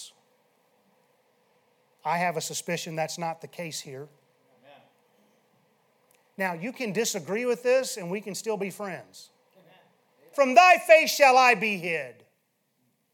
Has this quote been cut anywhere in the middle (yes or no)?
yes